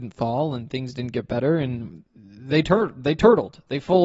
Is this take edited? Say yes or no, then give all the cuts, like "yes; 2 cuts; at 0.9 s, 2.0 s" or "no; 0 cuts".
yes; 1 cut; at 2.1 s